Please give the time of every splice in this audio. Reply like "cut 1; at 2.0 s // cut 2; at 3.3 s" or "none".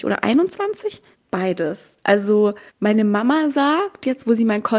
cut 1; at 1.1 s // cut 2; at 2.7 s